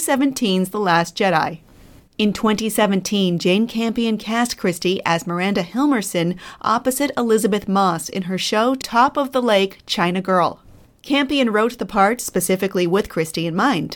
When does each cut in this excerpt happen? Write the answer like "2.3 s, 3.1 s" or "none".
none